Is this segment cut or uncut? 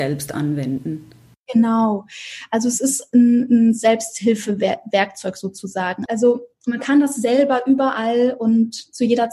cut